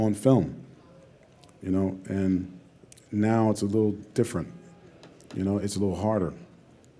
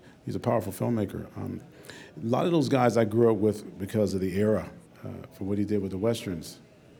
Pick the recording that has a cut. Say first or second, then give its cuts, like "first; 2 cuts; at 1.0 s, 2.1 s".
second; 2 cuts; at 1.6 s, 4.9 s